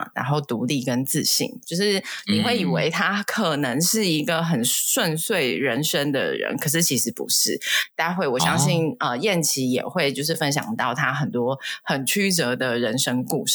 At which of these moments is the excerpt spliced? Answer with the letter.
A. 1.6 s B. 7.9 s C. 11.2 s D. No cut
D